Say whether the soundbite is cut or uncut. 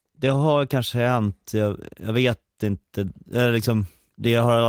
uncut